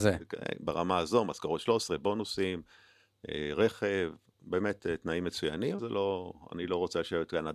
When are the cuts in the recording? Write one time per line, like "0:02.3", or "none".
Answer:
0:05.8